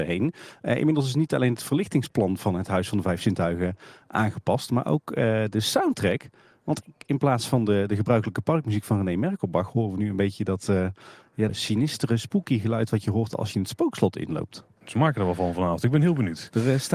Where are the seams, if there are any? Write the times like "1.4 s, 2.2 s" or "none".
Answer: 11.5 s

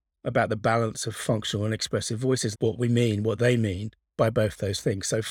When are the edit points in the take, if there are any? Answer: 2.5 s

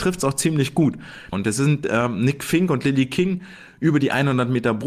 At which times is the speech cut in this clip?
1.3 s

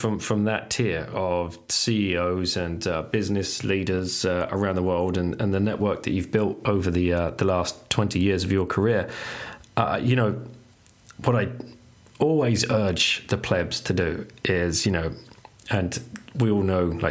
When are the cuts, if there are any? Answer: none

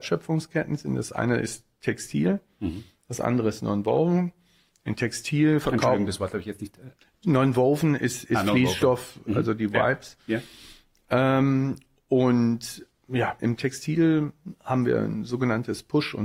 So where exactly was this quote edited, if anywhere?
13.4 s

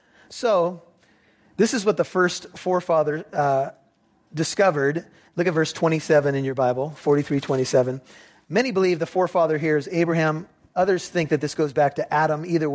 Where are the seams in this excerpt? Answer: none

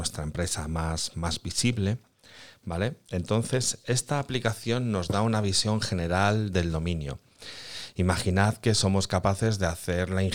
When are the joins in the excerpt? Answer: none

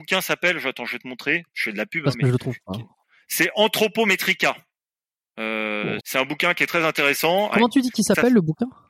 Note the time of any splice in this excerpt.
6.0 s, 7.5 s

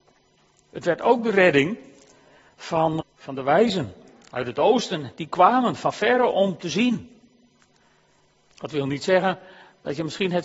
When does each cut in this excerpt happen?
3.0 s, 8.3 s

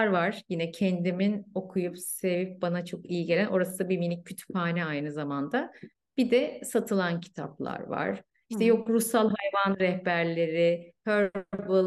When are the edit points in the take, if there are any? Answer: none

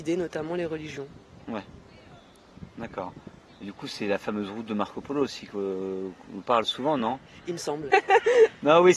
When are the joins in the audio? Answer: 6.4 s, 7.9 s

